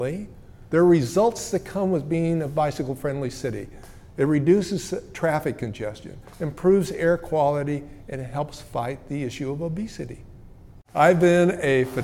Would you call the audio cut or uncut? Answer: cut